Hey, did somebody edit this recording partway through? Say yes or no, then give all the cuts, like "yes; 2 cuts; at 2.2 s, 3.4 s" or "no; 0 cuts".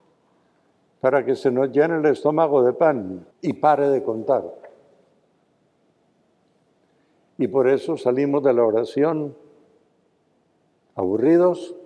yes; 1 cut; at 3.3 s